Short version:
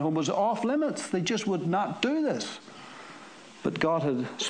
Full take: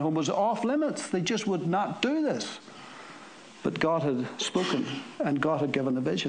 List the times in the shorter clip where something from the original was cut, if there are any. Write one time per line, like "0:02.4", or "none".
none